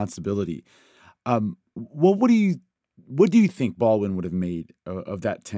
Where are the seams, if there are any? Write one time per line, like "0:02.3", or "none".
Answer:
none